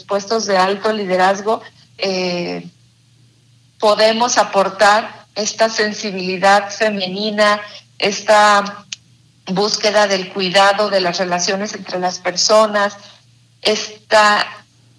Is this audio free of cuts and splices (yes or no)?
no